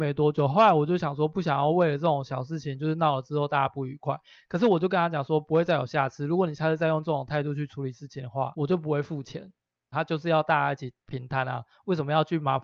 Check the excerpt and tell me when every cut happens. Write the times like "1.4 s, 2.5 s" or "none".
9.9 s